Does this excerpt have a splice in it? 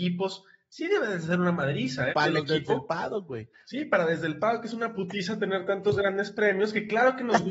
yes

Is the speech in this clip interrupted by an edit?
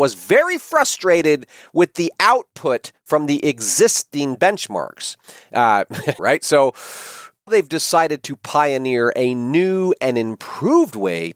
yes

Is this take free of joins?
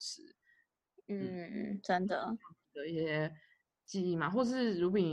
yes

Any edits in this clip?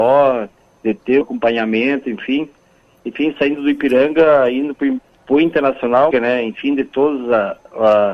yes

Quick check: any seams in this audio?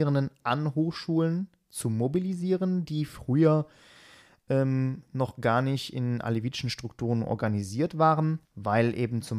yes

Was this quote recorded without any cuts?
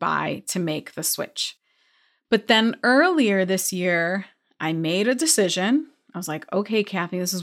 yes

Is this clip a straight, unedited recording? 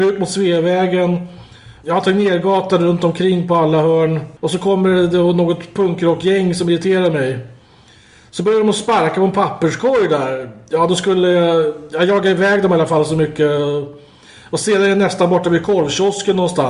no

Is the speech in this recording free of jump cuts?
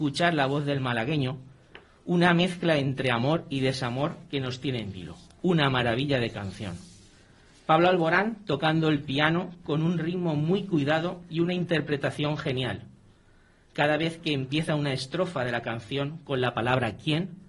yes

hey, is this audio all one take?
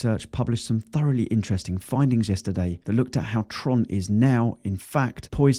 yes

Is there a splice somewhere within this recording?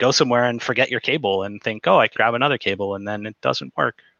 yes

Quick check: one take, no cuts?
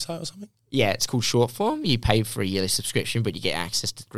yes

